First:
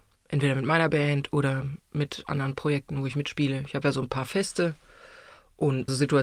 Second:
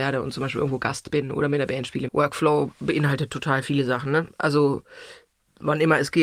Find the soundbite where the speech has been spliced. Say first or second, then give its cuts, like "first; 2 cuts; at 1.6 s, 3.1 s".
second; 1 cut; at 2.1 s